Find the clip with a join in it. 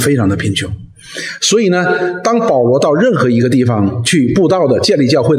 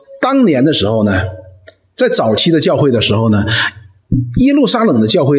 first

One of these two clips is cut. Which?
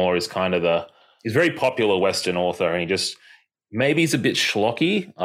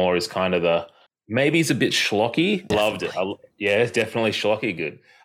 second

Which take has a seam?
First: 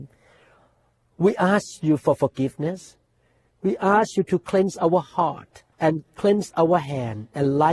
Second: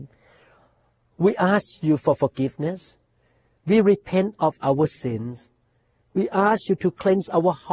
first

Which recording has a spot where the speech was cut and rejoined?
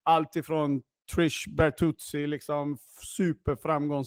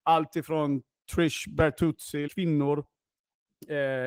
second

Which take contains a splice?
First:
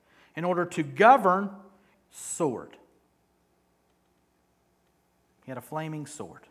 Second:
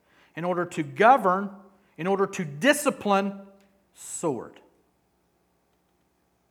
first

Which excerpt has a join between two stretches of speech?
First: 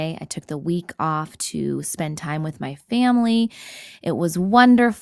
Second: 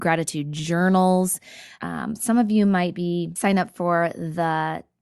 second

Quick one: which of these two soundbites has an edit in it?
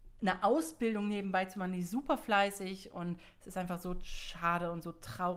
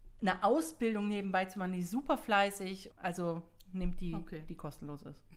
second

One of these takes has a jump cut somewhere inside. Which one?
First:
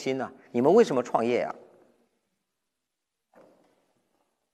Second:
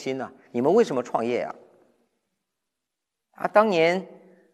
first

